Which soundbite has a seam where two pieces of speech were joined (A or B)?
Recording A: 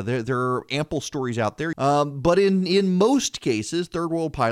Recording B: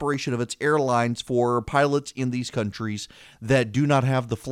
A